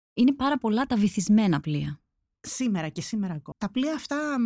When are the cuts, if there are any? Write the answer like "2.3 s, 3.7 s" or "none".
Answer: 3.5 s